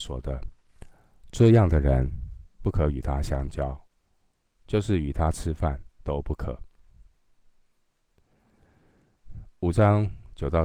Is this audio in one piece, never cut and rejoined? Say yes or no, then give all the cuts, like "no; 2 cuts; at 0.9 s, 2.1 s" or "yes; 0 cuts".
yes; 0 cuts